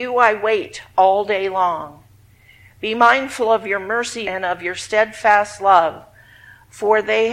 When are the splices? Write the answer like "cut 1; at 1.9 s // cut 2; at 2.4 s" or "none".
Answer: cut 1; at 4.2 s